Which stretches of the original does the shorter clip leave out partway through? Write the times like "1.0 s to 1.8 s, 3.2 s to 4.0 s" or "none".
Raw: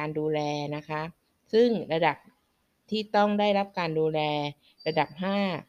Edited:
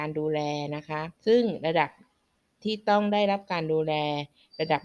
1.2 s to 1.4 s